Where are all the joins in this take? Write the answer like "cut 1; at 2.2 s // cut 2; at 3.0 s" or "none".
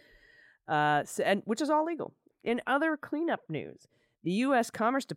cut 1; at 2.3 s